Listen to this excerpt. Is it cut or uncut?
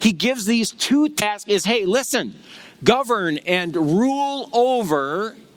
uncut